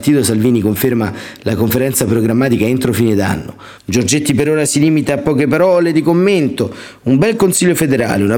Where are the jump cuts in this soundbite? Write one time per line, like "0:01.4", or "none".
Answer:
0:03.8